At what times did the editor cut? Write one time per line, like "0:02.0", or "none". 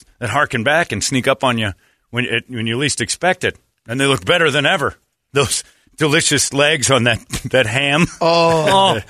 none